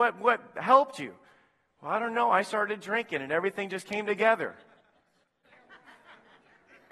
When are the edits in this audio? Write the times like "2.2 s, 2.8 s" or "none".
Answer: none